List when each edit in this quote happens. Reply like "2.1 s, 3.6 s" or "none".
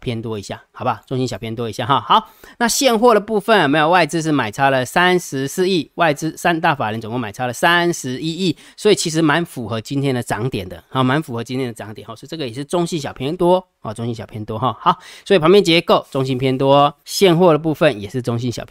17.0 s